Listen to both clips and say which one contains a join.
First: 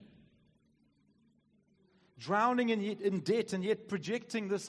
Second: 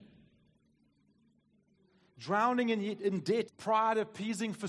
second; 1 cut; at 3.5 s

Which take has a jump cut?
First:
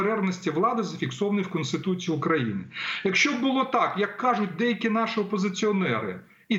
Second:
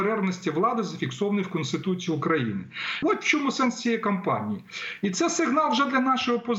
second; 1 cut; at 3.0 s

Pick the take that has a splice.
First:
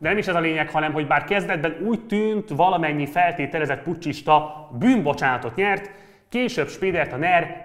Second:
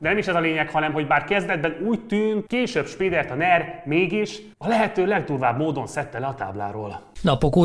second; 2 cuts; at 2.5 s, 4.5 s

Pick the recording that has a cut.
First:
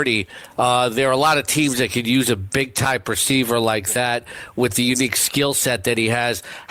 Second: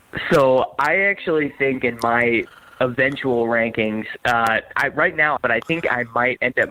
second; 1 cut; at 5.4 s

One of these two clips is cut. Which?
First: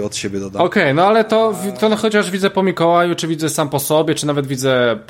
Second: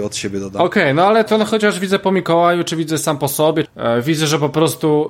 second; 2 cuts; at 1.3 s, 3.6 s

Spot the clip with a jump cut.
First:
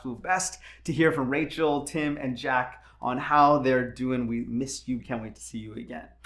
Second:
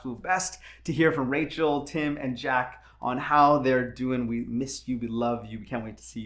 first; 1 cut; at 5.0 s

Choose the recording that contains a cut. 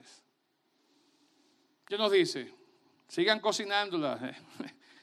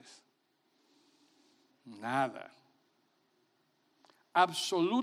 second; 1 cut; at 1.7 s

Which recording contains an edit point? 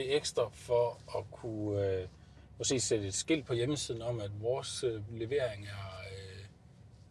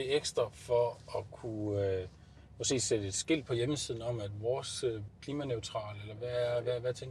second; 2 cuts; at 5.1 s, 6.2 s

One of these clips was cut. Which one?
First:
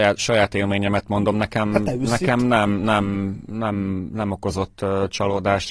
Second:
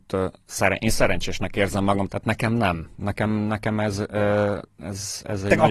second; 1 cut; at 2.1 s

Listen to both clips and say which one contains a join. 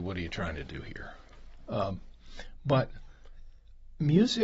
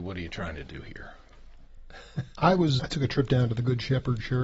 second; 2 cuts; at 1.7 s, 2.8 s

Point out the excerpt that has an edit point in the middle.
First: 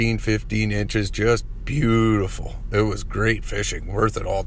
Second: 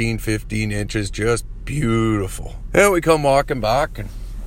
second; 1 cut; at 2.7 s

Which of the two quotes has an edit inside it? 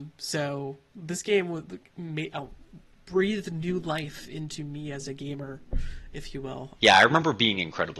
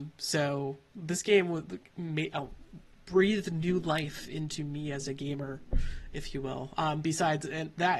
first; 1 cut; at 6.8 s

